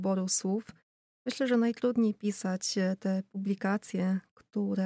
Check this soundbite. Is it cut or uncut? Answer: uncut